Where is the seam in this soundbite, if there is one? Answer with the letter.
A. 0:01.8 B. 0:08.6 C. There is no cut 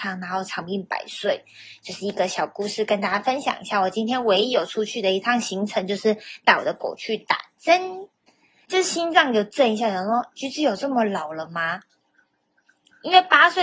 B